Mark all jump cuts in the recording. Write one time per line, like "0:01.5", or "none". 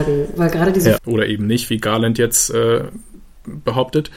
0:01.0

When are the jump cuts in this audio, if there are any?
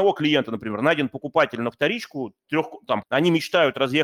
0:03.0

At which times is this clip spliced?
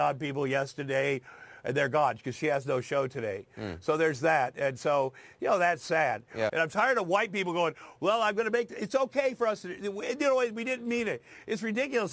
0:06.5

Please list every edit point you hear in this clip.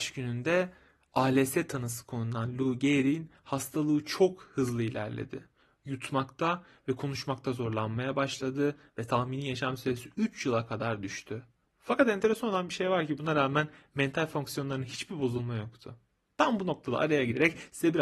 none

